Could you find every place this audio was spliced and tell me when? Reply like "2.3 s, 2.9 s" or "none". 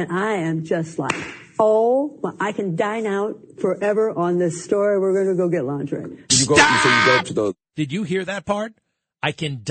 none